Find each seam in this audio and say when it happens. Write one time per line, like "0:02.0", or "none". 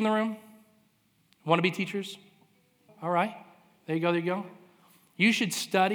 0:02.9